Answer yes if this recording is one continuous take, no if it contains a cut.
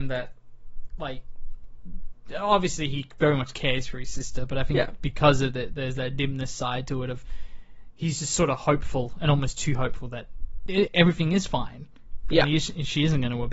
yes